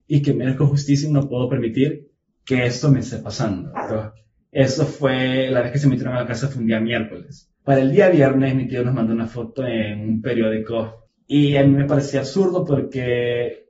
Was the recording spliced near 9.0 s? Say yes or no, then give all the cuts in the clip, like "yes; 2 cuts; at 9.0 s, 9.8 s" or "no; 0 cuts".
no; 3 cuts; at 3.8 s, 7.6 s, 11.1 s